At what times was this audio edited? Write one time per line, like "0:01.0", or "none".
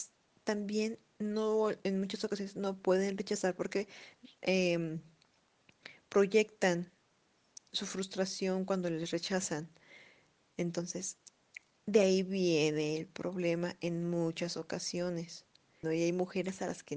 0:15.8